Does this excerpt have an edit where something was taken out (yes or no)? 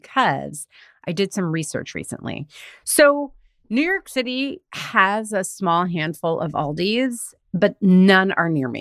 no